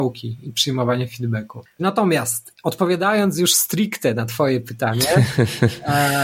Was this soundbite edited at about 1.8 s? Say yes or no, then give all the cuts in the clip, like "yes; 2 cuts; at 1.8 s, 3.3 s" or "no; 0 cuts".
yes; 1 cut; at 1.8 s